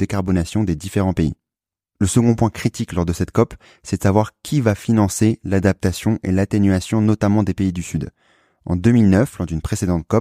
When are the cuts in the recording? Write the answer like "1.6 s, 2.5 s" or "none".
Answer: none